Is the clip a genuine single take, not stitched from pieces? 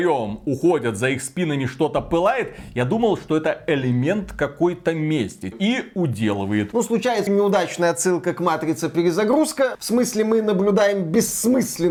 no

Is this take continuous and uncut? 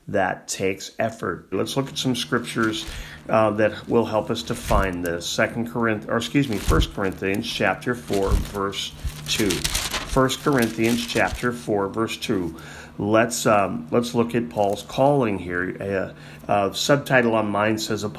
no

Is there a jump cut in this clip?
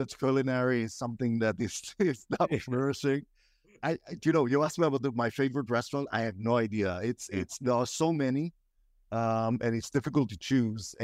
no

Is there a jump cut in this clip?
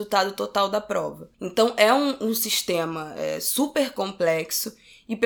no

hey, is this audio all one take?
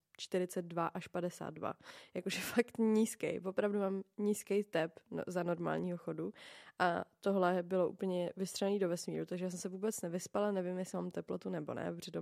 yes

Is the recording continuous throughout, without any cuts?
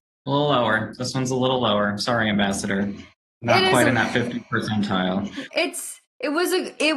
no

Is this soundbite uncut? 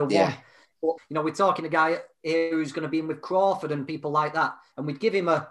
no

